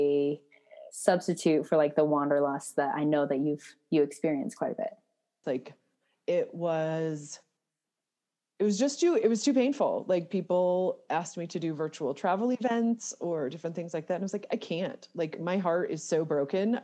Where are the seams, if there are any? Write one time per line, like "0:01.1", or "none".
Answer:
0:05.4